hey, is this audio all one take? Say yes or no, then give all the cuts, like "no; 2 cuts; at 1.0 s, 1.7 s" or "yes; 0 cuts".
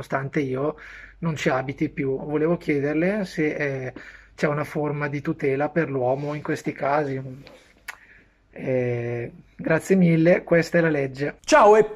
yes; 0 cuts